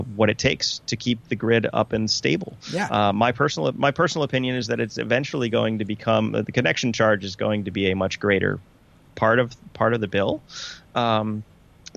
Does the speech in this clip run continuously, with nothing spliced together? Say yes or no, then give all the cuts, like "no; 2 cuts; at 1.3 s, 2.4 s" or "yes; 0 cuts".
yes; 0 cuts